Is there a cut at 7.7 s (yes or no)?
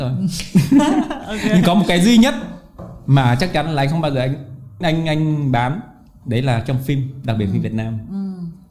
no